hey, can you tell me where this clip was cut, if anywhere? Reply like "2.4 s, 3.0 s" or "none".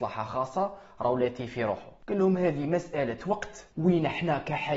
3.7 s